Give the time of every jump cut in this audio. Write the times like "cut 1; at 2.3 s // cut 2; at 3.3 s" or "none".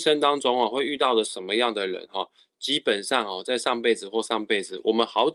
cut 1; at 4.2 s